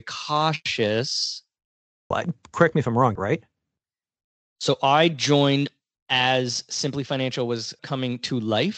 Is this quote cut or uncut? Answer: cut